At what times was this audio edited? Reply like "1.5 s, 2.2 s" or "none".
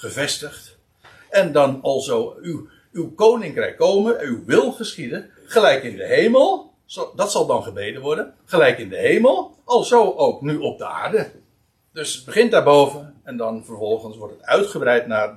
none